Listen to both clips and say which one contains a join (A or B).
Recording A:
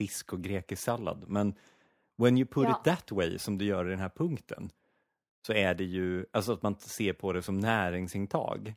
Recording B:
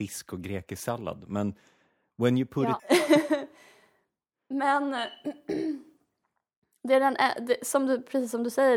B